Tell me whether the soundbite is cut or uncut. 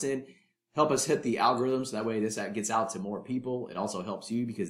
uncut